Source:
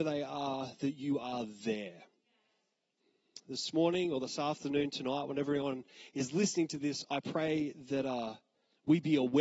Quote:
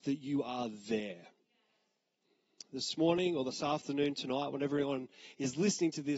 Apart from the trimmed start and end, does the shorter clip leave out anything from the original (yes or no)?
no